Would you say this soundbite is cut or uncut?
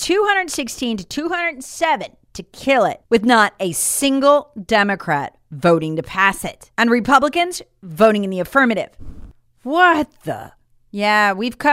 uncut